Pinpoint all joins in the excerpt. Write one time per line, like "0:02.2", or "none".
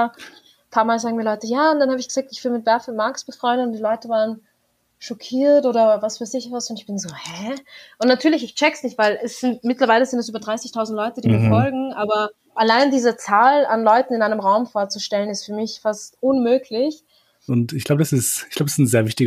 0:12.6
0:17.5